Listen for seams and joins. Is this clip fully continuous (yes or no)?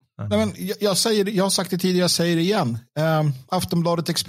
yes